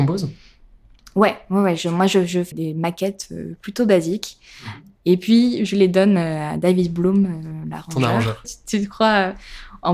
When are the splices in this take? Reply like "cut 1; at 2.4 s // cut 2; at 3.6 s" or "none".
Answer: cut 1; at 2.5 s // cut 2; at 8.4 s